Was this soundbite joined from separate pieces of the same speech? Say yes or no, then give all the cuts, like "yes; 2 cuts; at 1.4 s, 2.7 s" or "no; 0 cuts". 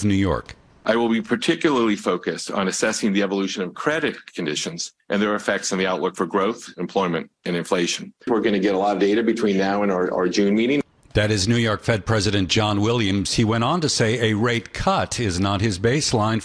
no; 0 cuts